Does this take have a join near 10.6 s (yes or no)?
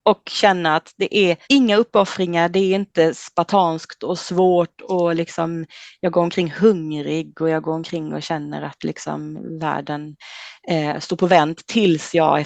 no